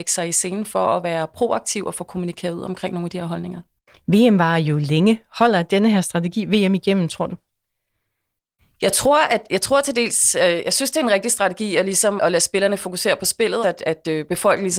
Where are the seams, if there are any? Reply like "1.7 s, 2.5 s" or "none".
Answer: 12.2 s, 13.6 s